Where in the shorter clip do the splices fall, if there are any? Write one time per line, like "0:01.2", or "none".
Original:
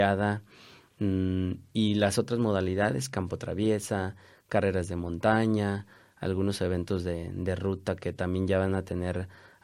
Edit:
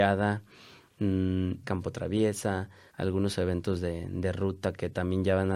0:01.6
0:02.9